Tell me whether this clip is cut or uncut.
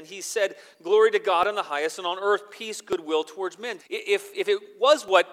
cut